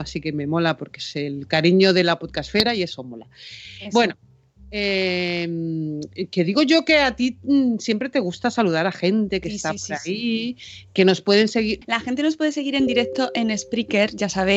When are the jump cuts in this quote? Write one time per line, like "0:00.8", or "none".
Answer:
0:11.8